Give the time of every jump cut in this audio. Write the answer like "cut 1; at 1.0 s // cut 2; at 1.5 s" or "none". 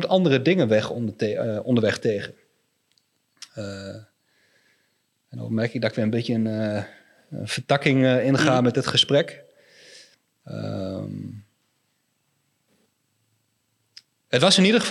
none